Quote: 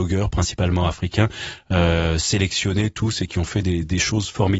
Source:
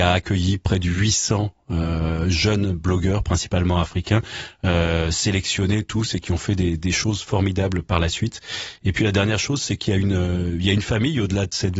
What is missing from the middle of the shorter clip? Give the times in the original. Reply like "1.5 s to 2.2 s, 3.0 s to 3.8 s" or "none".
none